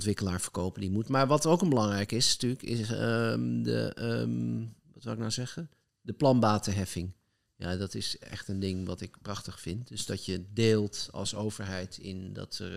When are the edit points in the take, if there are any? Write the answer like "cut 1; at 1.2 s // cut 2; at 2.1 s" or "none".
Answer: none